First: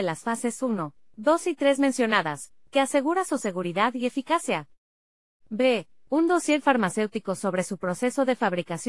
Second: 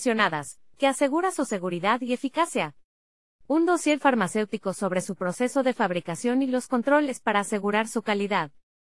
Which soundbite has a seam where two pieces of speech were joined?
second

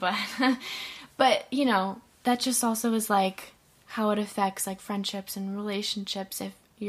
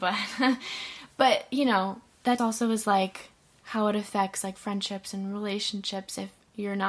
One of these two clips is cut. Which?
second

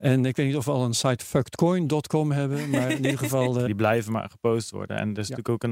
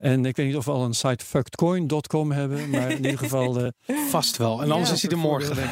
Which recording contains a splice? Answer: first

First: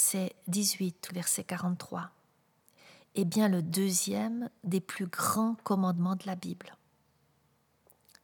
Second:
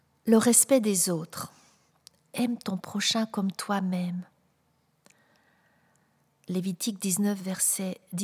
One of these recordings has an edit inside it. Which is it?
first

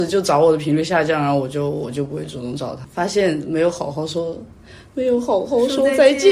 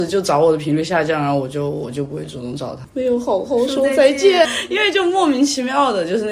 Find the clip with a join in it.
second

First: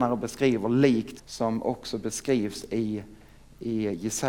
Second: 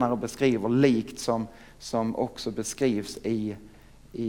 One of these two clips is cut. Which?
first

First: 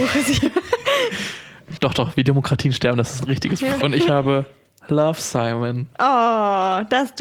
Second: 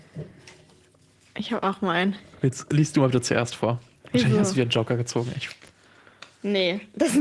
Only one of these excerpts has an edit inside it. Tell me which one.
first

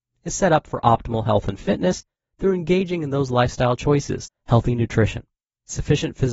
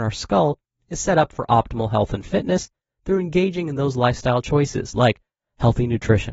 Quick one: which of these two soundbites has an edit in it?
first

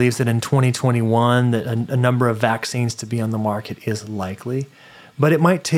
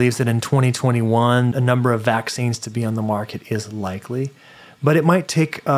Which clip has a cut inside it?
second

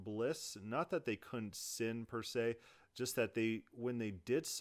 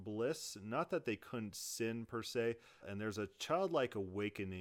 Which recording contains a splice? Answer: second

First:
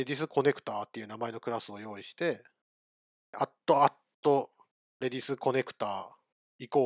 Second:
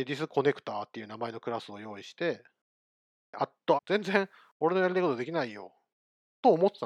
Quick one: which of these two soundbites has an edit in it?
second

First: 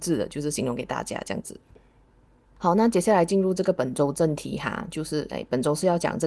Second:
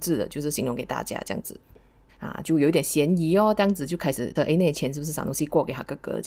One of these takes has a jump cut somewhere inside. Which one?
second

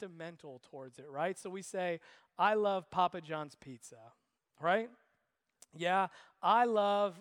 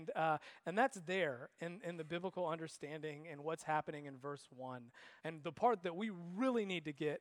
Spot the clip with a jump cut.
second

